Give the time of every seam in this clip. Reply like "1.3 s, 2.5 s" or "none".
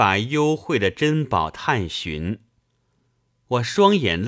none